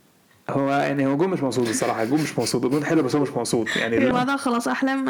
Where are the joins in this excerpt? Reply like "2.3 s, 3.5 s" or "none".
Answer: 4.1 s